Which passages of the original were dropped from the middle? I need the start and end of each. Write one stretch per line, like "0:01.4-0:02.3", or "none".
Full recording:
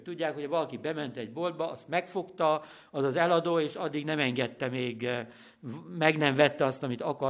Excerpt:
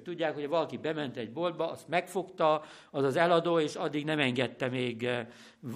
none